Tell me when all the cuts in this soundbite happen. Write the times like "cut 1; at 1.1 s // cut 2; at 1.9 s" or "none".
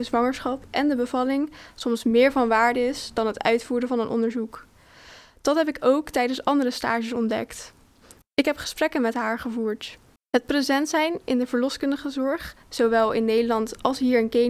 cut 1; at 8.2 s // cut 2; at 10.2 s